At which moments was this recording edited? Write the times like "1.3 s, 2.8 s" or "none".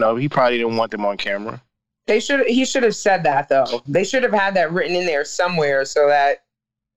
none